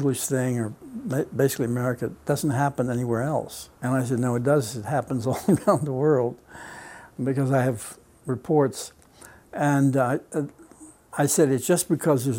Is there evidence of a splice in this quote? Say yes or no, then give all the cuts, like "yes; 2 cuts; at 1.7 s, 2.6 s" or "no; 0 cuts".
yes; 1 cut; at 3.8 s